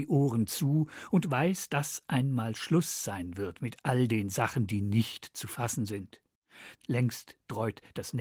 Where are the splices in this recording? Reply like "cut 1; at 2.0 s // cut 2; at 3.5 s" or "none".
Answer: cut 1; at 6.8 s